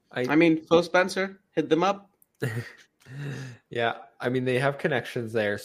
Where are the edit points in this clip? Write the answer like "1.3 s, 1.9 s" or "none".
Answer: none